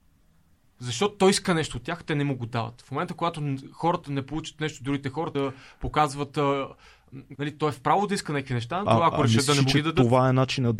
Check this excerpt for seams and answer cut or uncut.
cut